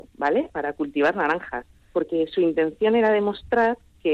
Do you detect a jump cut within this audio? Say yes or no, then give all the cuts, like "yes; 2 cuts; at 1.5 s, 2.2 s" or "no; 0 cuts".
no; 0 cuts